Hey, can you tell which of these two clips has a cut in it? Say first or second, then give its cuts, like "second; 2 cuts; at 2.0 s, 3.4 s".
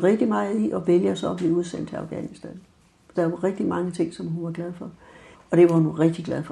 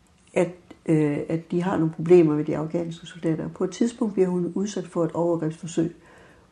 first; 2 cuts; at 3.1 s, 5.3 s